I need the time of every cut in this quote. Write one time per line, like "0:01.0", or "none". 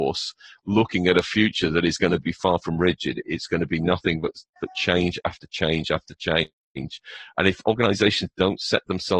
none